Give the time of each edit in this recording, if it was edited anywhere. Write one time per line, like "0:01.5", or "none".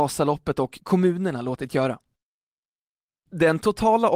0:03.2